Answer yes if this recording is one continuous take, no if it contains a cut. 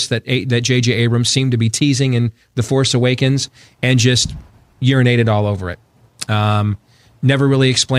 yes